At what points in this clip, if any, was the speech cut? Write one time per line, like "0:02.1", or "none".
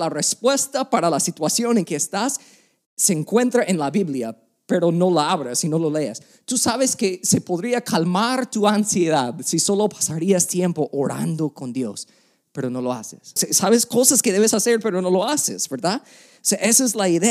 0:13.4